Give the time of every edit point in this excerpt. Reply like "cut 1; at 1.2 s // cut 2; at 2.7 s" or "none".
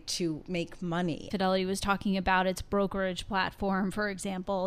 cut 1; at 1.3 s